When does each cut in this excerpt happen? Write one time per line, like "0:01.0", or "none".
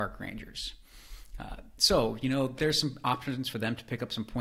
none